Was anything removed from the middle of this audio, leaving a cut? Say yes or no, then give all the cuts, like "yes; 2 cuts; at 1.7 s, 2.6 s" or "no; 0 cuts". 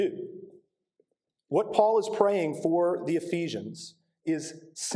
no; 0 cuts